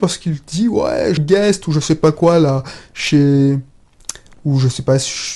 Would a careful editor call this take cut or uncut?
cut